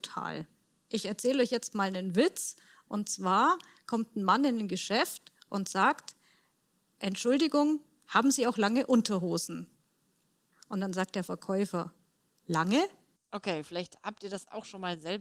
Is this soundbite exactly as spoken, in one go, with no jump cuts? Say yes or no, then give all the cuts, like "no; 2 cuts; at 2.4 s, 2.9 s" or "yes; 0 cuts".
no; 2 cuts; at 10.5 s, 13.1 s